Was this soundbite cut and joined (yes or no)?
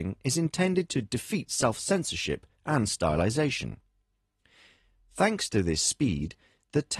no